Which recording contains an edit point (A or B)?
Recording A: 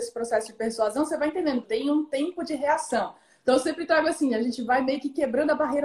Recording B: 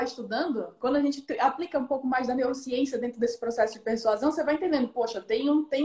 A